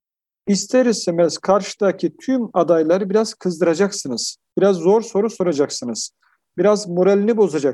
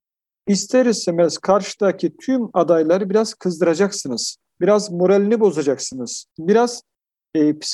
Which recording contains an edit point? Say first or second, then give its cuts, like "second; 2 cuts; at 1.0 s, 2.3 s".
second; 2 cuts; at 4.4 s, 6.3 s